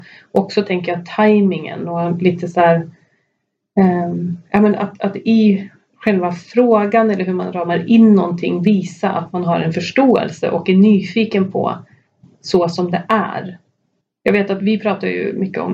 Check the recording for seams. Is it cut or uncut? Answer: uncut